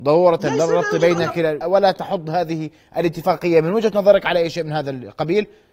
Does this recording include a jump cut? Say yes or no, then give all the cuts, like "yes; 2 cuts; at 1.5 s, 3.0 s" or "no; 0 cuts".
yes; 1 cut; at 1.6 s